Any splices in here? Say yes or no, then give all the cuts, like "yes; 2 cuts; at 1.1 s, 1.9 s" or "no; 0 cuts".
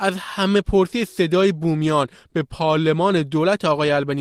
no; 0 cuts